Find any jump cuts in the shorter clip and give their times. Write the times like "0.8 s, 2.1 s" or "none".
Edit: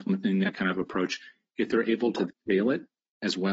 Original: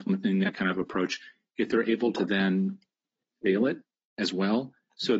2.3 s